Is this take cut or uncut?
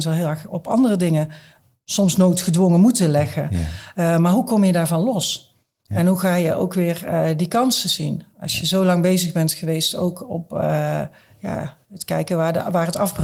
uncut